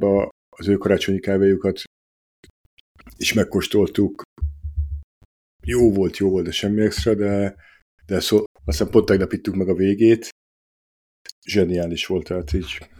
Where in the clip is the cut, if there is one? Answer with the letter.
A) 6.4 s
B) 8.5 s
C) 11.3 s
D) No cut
B